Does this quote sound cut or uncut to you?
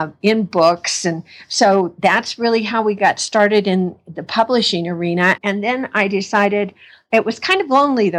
cut